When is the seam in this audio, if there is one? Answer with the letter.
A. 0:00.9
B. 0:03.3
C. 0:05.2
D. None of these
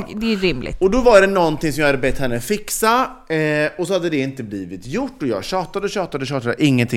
D